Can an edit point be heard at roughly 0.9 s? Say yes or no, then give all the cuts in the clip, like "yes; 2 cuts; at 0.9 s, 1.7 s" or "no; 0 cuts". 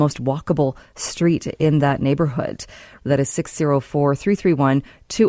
no; 1 cut; at 3.0 s